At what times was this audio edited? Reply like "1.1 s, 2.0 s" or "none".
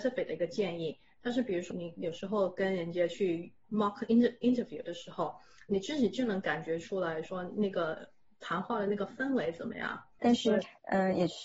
1.7 s, 10.2 s